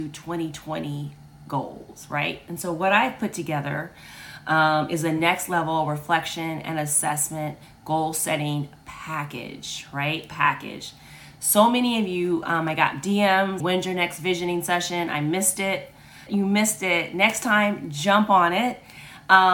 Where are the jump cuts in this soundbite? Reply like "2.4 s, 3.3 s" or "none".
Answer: 13.6 s, 16.3 s